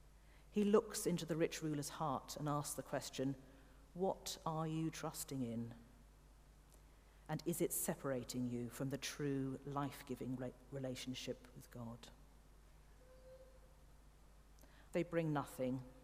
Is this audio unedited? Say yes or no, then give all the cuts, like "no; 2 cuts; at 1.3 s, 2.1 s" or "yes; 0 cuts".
no; 1 cut; at 14.9 s